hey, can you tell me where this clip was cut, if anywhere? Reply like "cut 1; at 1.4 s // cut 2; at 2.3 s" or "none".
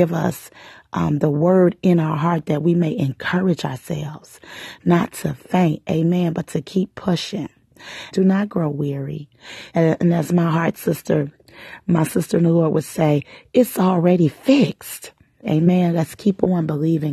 cut 1; at 8.1 s // cut 2; at 9.7 s // cut 3; at 15.4 s